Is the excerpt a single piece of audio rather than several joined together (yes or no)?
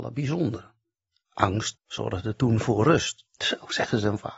no